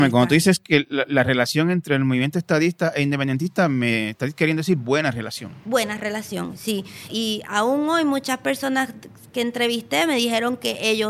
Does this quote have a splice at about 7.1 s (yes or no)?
yes